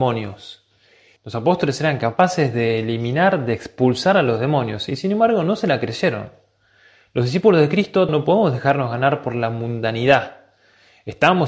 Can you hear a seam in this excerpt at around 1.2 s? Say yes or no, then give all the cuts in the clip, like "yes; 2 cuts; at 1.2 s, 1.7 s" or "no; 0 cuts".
yes; 2 cuts; at 1.2 s, 8.1 s